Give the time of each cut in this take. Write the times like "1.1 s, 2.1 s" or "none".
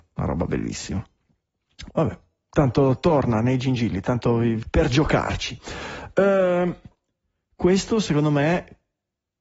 1.9 s, 4.6 s